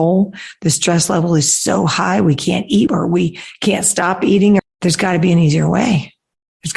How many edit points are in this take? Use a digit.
2